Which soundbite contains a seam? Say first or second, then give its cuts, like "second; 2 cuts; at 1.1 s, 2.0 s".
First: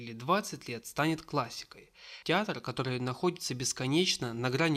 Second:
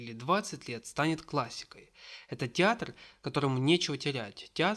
first; 1 cut; at 2.2 s